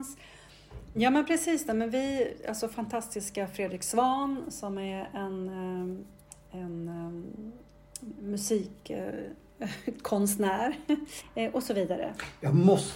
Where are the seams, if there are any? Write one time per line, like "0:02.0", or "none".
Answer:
0:01.0
0:11.2